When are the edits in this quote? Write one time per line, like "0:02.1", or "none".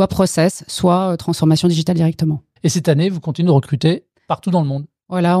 0:02.6